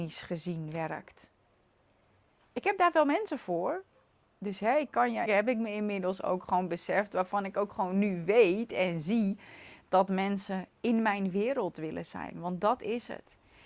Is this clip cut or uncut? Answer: cut